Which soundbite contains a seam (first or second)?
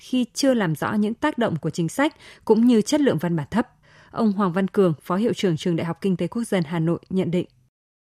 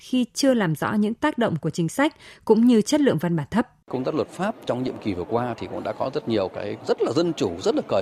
second